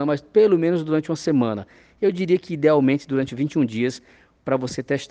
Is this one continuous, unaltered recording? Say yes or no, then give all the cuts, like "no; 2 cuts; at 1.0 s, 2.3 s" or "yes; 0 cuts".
yes; 0 cuts